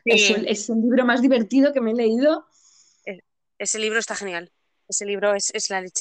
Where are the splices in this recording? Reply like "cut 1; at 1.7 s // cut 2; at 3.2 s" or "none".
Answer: none